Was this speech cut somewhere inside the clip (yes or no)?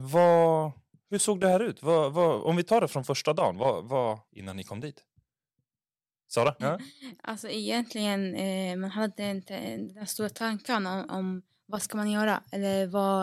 yes